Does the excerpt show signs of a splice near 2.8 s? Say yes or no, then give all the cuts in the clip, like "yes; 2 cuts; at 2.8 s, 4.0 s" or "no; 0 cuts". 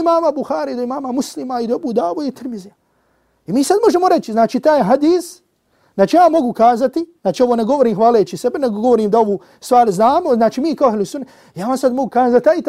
no; 1 cut; at 7.2 s